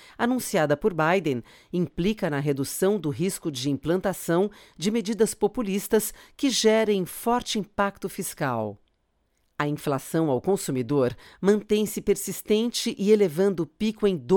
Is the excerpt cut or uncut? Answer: uncut